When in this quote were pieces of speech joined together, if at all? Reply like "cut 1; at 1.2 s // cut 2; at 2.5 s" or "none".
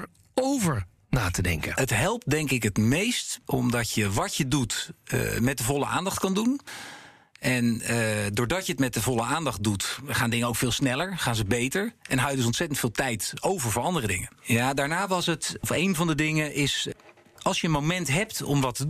cut 1; at 14.4 s